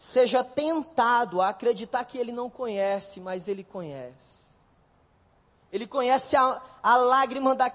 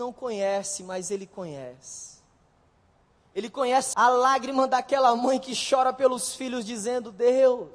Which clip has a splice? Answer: second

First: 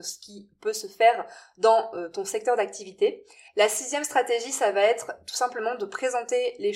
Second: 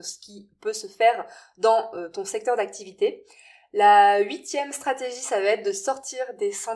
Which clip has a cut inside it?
first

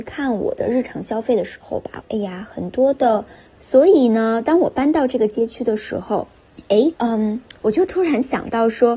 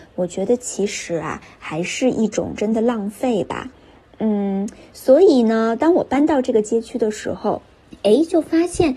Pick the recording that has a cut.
first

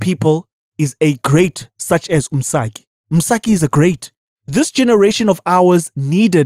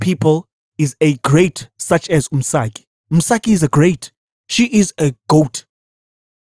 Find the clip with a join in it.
first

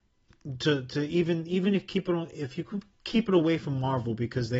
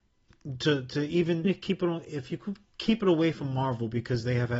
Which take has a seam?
second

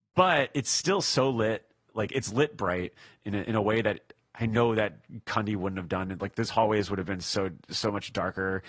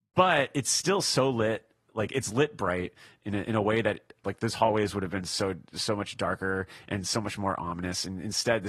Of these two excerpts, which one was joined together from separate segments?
second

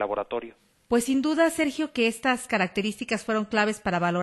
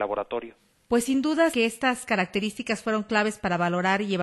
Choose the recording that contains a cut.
second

